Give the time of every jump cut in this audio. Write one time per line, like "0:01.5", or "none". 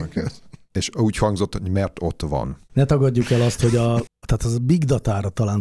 0:02.7
0:04.1